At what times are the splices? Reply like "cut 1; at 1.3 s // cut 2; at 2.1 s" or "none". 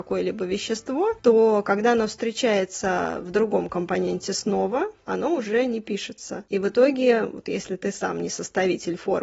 none